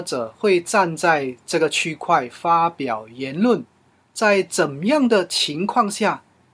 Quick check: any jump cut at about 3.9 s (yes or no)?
no